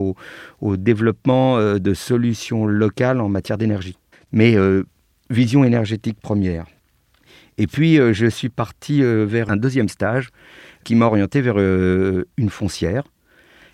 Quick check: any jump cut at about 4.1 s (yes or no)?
yes